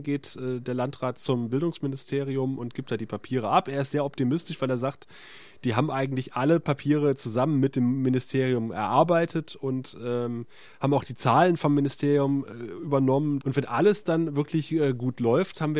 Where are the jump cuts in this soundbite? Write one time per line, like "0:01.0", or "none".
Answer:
0:13.4